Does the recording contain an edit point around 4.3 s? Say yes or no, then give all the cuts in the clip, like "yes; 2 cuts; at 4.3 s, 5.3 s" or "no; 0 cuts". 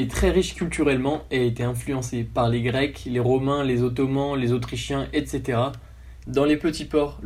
no; 1 cut; at 6.2 s